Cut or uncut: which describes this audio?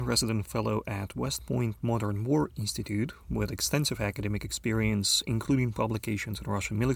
uncut